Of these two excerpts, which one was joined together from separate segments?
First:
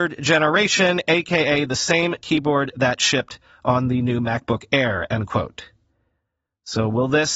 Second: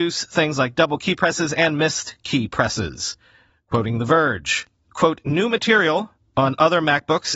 second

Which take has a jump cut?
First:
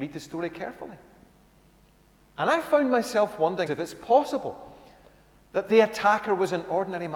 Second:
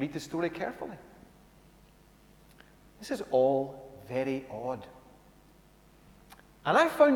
first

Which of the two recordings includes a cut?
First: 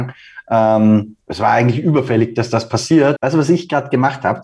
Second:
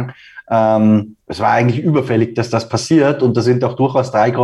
first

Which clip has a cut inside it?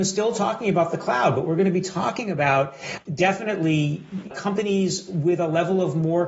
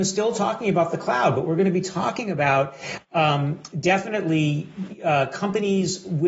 first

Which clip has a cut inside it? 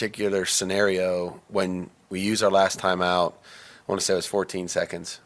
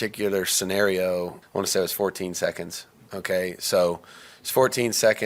second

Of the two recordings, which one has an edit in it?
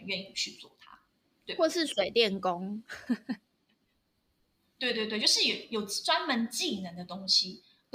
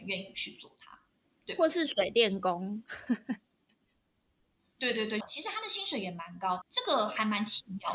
second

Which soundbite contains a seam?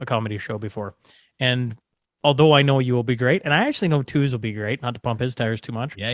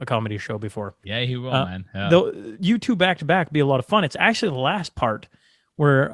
second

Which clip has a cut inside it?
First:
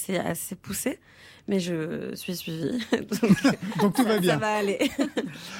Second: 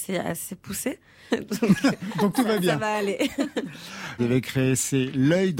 second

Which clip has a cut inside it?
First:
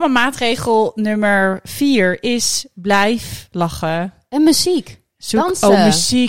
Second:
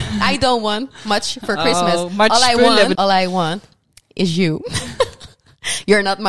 second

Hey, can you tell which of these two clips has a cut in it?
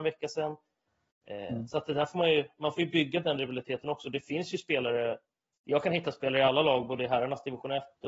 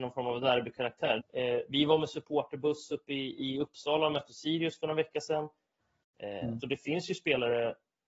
second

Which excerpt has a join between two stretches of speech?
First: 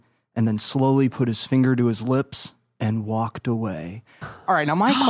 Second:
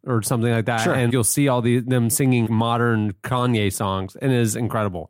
second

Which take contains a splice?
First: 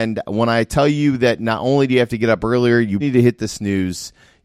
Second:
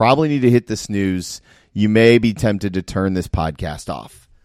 first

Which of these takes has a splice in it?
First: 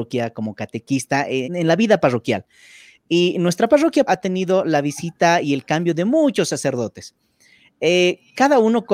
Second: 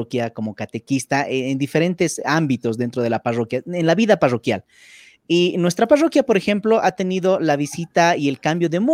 first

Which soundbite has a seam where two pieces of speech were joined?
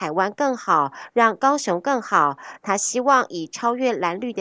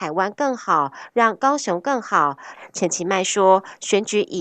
second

